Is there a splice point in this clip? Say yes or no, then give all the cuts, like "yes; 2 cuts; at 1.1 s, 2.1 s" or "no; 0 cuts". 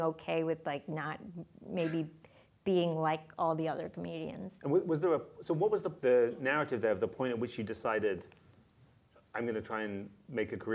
yes; 2 cuts; at 4.6 s, 6.0 s